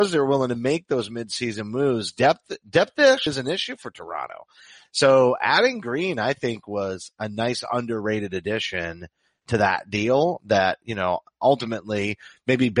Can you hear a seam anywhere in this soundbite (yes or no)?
yes